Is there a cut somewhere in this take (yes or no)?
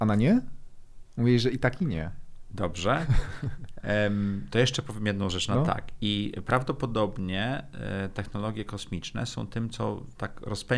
no